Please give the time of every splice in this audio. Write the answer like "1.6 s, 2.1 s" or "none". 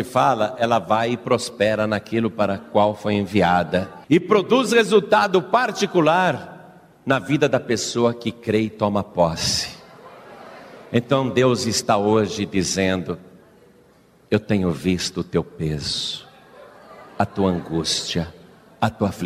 4.0 s

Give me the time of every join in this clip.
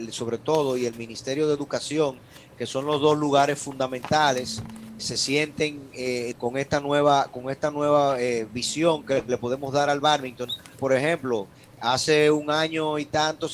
5.0 s, 6.3 s, 10.8 s

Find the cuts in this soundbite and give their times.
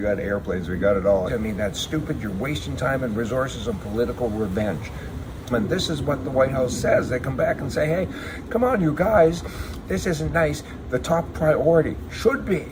1.3 s, 5.5 s, 9.8 s

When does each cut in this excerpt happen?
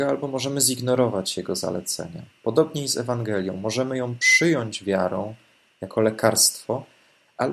none

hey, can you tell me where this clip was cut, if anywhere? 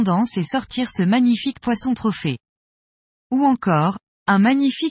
none

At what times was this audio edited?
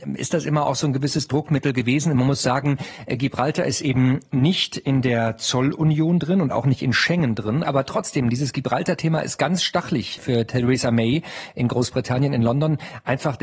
7.6 s

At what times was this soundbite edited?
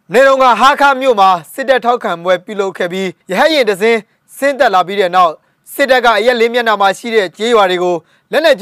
3.2 s

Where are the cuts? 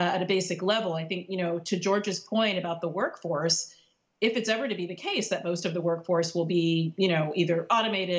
none

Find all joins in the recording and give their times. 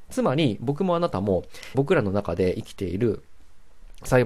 1.7 s

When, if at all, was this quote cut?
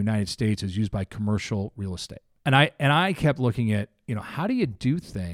2.4 s

